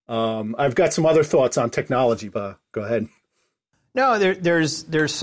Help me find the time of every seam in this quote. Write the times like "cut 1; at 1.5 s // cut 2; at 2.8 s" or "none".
cut 1; at 2.3 s